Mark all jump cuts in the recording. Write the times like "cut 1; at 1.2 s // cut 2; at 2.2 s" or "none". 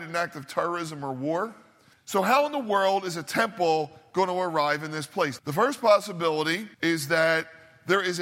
cut 1; at 1.9 s // cut 2; at 5.4 s // cut 3; at 6.7 s